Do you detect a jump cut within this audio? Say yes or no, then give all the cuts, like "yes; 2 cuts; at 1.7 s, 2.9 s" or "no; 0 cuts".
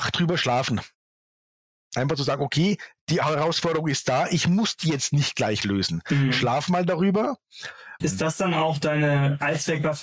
yes; 1 cut; at 8.0 s